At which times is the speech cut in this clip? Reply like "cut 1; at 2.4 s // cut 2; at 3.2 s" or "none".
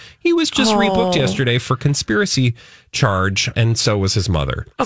cut 1; at 3.5 s